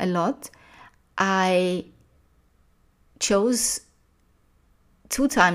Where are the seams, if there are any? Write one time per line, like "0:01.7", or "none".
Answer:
none